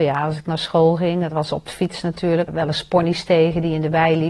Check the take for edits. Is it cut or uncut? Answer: cut